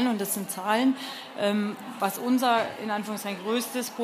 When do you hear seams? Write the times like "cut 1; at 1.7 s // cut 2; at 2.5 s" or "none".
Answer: none